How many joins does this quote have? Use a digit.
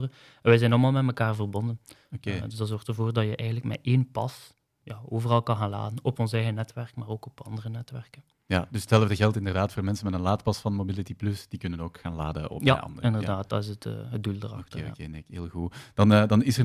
0